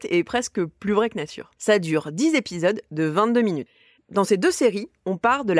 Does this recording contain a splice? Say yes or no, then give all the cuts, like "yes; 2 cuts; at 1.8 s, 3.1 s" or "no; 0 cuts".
yes; 1 cut; at 1.6 s